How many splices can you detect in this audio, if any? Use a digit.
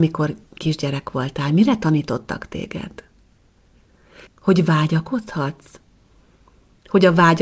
1